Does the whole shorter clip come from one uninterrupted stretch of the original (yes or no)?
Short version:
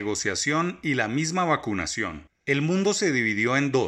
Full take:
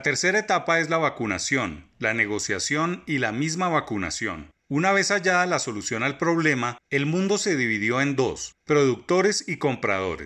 no